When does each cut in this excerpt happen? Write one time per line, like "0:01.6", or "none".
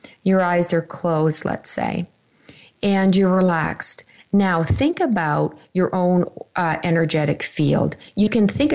none